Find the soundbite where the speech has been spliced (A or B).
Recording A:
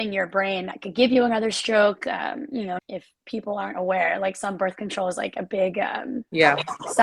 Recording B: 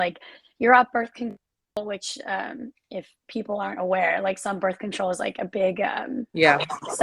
A